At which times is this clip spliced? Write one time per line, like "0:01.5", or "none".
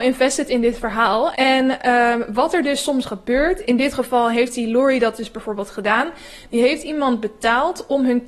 0:01.3
0:03.6